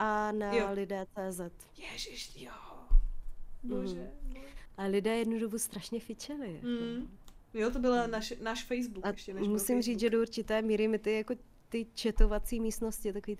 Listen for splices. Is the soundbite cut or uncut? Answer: uncut